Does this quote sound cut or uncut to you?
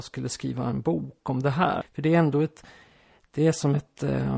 cut